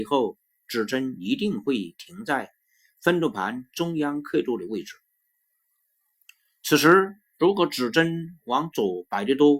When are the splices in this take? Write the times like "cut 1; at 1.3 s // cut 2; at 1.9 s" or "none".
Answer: none

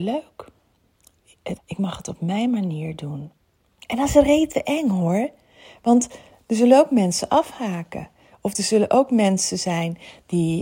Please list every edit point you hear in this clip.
cut 1; at 1.6 s

